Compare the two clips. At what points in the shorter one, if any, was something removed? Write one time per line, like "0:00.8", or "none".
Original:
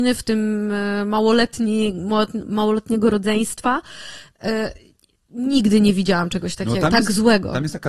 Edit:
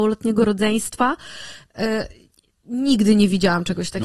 none